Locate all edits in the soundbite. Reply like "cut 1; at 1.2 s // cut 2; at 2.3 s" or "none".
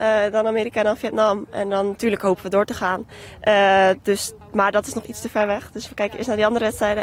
cut 1; at 4.4 s